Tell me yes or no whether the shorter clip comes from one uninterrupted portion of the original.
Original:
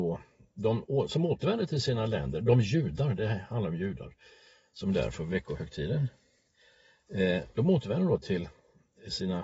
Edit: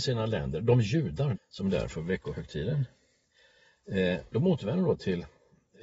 no